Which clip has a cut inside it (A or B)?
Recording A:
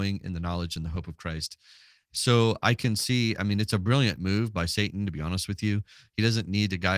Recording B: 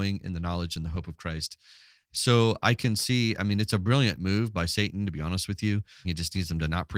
B